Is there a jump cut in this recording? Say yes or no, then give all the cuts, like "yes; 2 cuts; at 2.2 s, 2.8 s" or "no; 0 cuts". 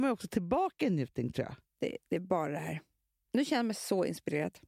no; 0 cuts